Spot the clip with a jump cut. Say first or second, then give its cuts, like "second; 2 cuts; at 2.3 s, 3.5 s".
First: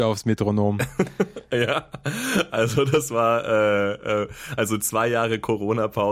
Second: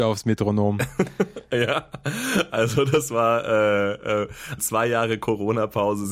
second; 1 cut; at 4.6 s